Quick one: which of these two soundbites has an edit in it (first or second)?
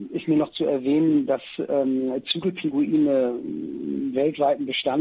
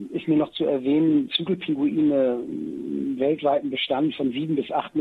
second